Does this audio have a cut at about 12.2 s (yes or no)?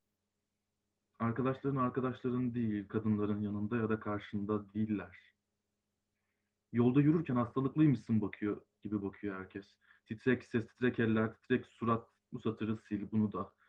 yes